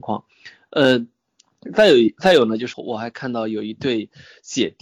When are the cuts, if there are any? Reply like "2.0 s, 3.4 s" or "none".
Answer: 2.7 s